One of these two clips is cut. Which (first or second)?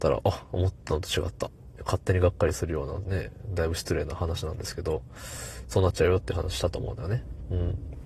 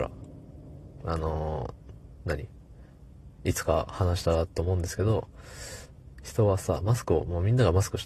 first